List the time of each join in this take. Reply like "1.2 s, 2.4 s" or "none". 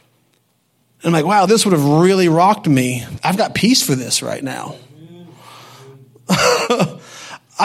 1.5 s, 3.2 s